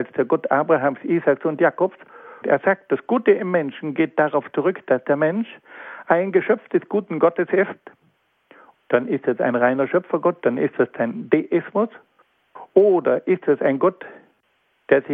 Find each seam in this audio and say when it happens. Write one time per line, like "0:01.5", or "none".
0:02.4
0:08.7